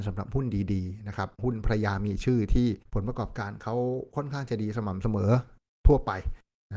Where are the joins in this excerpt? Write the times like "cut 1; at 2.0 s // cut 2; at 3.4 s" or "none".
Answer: cut 1; at 2.9 s